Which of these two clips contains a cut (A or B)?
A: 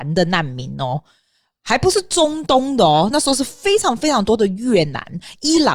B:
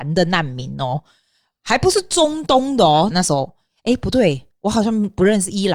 B